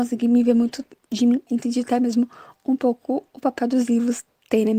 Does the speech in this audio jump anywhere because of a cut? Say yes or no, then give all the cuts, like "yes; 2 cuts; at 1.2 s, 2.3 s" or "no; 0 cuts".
yes; 1 cut; at 1.5 s